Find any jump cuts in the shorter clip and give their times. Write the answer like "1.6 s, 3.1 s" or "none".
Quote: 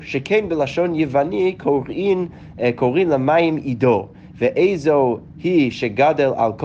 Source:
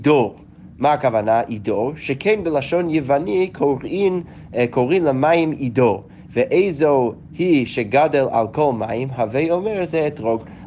none

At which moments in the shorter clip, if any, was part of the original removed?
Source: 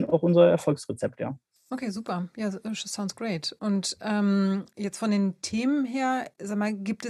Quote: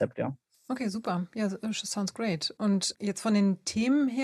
2.9 s

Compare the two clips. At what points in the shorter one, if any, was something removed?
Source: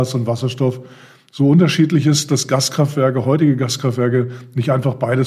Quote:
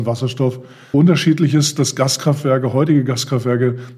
0.9 s

